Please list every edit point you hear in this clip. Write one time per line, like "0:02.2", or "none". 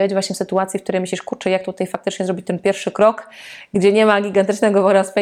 none